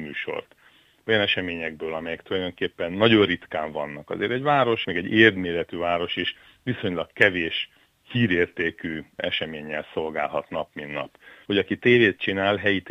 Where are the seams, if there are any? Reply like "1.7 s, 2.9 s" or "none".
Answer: 4.8 s, 11.5 s